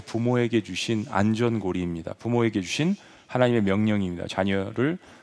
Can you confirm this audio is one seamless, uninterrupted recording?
yes; 0 cuts

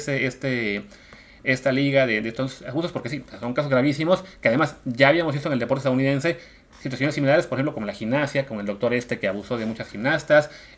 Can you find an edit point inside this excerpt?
no; 0 cuts

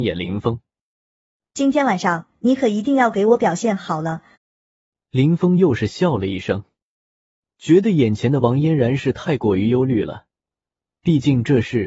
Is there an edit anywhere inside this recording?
yes; 1 cut; at 4.3 s

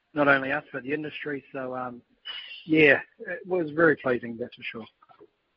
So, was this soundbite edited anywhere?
no; 0 cuts

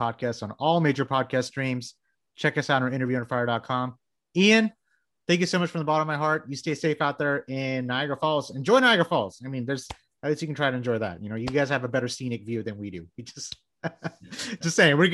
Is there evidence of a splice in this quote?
no; 0 cuts

